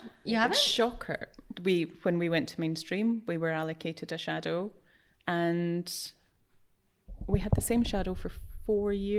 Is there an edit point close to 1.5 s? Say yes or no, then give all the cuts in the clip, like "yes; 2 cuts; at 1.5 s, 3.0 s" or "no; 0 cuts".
yes; 1 cut; at 1.5 s